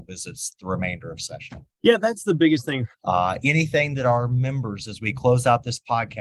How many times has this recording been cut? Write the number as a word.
two